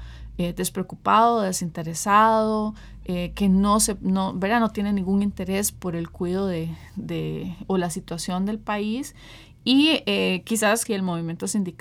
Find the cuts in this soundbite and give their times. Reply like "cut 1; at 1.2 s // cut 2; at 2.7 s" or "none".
cut 1; at 10.9 s